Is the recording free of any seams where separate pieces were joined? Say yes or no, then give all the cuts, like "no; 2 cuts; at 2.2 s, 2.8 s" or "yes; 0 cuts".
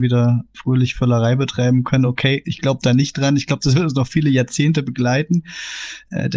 yes; 0 cuts